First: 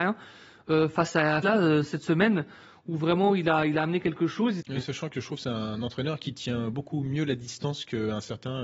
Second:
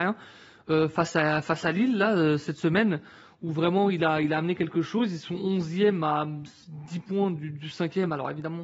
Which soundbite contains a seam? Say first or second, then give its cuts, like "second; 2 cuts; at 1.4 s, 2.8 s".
first; 2 cuts; at 1.4 s, 4.6 s